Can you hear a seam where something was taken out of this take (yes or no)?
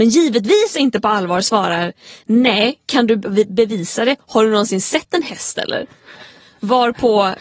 no